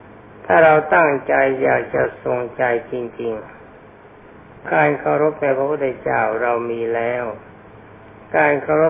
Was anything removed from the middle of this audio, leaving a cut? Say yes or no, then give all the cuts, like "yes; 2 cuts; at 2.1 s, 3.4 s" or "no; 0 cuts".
no; 0 cuts